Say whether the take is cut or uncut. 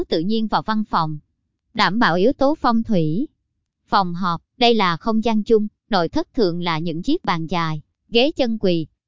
cut